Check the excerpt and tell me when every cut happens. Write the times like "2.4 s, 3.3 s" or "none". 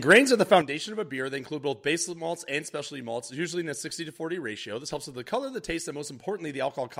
none